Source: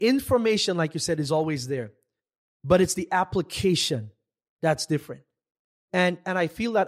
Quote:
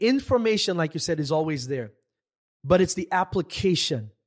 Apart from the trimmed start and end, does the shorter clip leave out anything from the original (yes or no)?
no